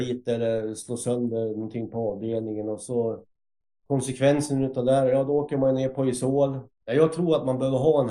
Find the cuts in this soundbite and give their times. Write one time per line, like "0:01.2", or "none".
0:06.7